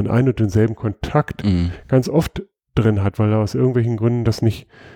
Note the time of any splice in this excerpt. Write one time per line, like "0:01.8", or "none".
none